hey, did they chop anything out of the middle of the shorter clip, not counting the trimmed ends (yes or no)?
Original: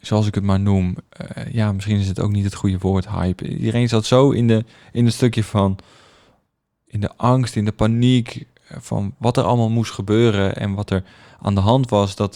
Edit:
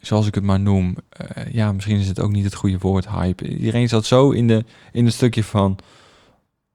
no